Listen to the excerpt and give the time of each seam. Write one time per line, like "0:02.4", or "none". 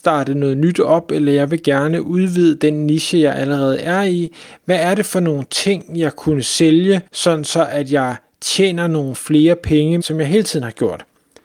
0:07.1
0:10.0